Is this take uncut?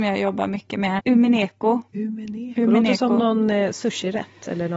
no; 1 cut; at 1.0 s

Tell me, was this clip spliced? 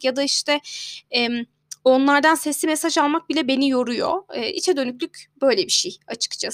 no; 0 cuts

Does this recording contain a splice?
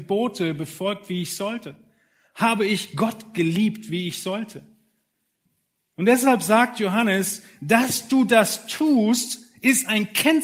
no; 0 cuts

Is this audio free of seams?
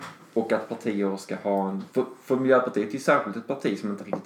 no; 1 cut; at 1.9 s

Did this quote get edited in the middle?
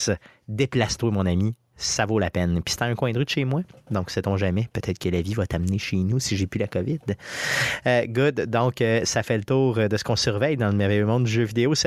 no; 0 cuts

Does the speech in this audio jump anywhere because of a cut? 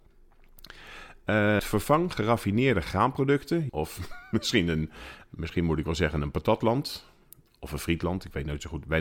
yes; 2 cuts; at 1.6 s, 3.7 s

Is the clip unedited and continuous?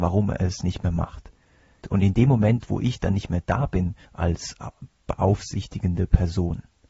no; 2 cuts; at 1.8 s, 4.0 s

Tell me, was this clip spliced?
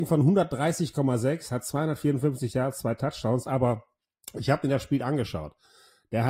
no; 0 cuts

